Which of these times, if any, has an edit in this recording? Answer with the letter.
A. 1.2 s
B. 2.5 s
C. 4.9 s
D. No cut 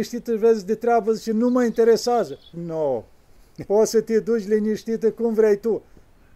B